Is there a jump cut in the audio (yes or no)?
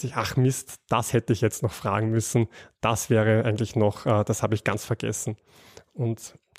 no